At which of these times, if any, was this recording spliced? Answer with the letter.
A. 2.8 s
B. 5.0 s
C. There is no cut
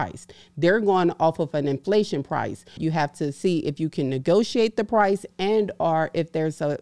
A